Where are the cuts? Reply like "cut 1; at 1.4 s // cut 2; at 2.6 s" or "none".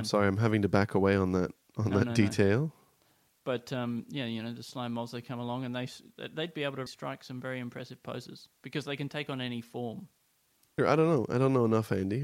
cut 1; at 6.9 s // cut 2; at 10.8 s